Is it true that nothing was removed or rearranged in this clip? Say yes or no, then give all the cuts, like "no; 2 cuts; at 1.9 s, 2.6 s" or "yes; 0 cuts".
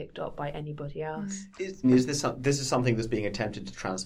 no; 1 cut; at 1.8 s